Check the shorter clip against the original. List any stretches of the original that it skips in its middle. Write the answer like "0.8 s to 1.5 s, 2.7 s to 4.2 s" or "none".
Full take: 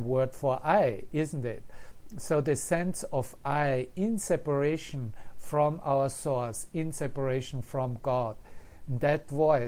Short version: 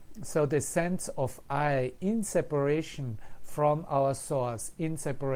none